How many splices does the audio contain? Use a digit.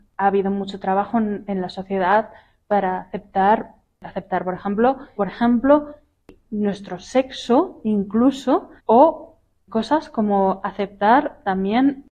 2